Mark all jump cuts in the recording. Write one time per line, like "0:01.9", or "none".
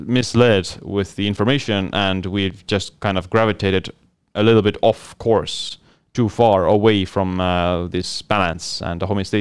none